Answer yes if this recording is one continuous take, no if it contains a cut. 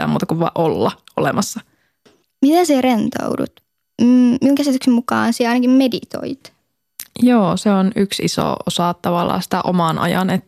no